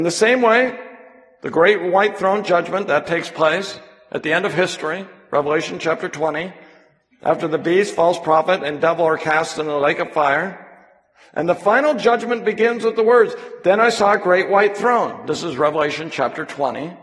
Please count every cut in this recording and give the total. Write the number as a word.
zero